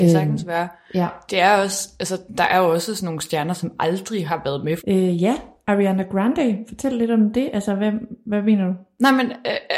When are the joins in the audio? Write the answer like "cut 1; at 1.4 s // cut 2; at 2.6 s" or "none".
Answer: cut 1; at 4.8 s